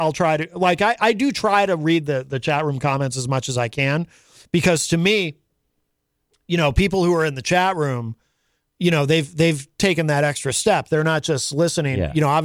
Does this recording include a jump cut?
no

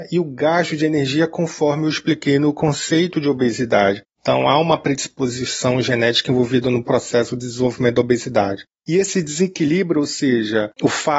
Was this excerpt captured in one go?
no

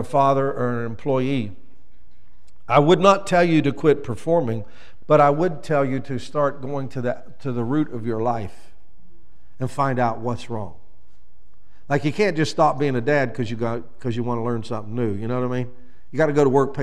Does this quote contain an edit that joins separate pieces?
no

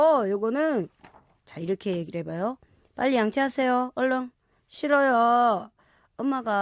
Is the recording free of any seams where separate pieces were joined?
yes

